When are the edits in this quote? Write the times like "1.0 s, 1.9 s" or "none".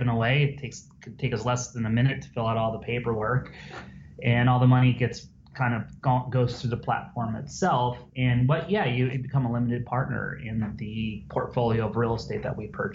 8.1 s, 9.1 s